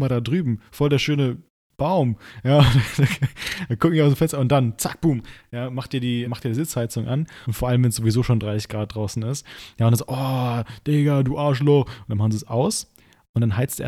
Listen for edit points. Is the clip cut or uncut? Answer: cut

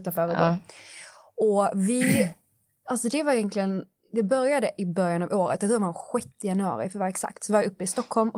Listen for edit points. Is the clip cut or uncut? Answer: uncut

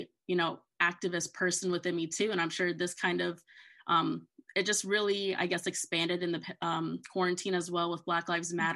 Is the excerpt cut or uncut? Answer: uncut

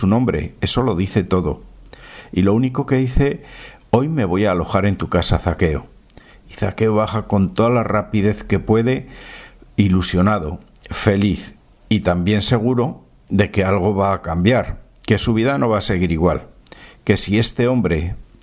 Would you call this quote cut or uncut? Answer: uncut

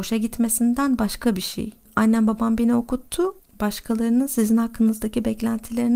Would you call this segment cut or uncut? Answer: cut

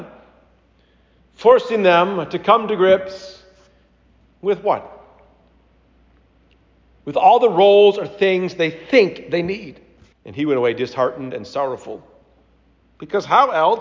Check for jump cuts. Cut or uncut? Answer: cut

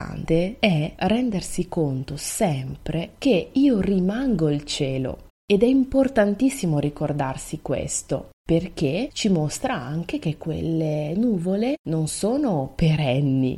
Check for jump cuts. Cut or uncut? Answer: cut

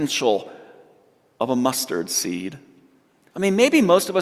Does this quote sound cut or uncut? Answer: cut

